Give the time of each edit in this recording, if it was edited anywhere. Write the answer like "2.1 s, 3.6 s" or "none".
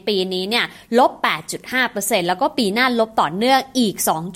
none

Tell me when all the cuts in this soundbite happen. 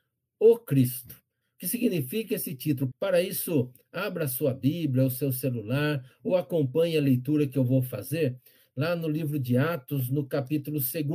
1.4 s, 2.9 s

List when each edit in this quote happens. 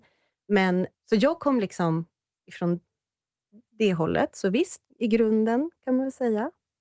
0.9 s, 4.8 s

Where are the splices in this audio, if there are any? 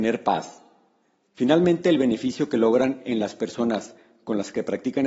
1.2 s

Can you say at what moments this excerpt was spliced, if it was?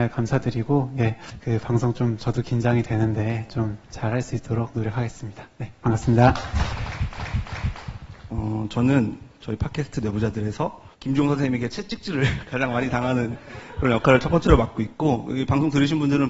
8.3 s, 10.9 s

